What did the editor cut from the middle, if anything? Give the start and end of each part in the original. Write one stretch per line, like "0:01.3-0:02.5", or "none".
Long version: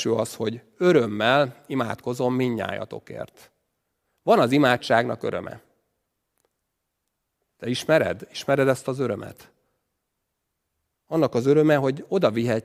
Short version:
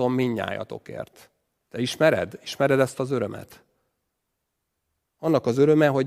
0:03.8-0:07.5